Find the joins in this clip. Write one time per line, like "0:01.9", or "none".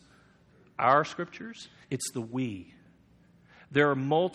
0:01.8